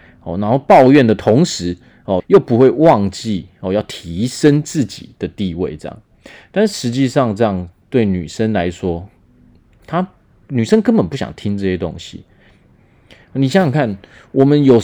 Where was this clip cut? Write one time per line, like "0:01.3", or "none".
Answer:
0:02.2